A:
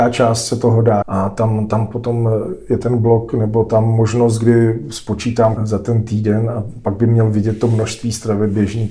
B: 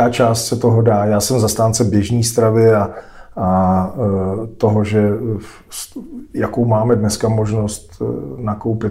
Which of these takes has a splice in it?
A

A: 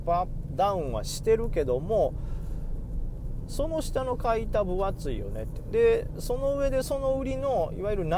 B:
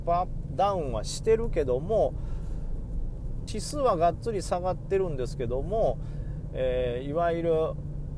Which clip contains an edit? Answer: B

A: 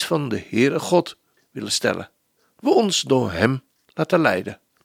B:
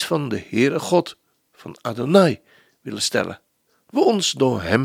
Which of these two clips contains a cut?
A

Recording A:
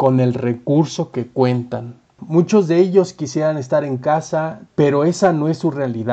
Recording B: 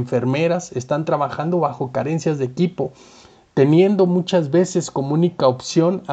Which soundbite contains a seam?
A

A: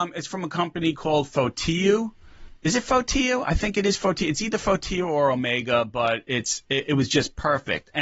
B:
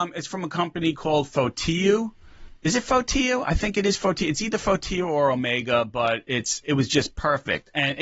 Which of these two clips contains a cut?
B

